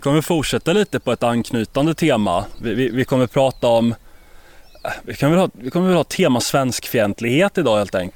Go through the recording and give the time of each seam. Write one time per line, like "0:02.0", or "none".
none